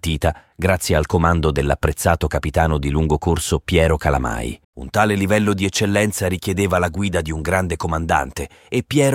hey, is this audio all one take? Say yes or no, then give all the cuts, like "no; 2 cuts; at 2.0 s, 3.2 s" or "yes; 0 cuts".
no; 1 cut; at 4.6 s